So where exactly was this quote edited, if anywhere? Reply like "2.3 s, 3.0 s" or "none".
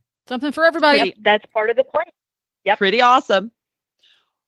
none